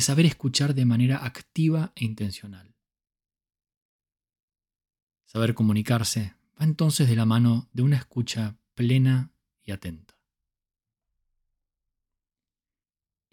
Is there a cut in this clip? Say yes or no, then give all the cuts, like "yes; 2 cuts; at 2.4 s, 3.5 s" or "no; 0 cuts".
no; 0 cuts